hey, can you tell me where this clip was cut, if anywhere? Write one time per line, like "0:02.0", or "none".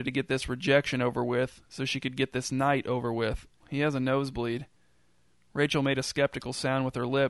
0:03.6